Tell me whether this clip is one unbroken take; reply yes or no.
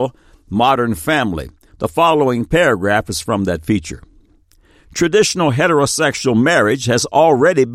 yes